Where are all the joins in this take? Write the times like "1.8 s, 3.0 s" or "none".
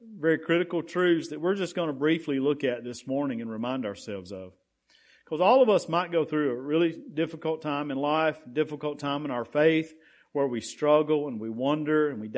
none

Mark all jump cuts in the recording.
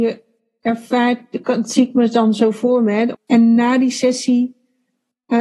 3.1 s

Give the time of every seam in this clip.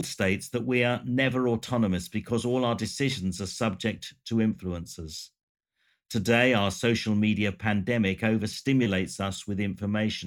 none

